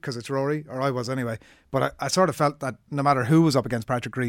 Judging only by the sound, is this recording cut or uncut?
uncut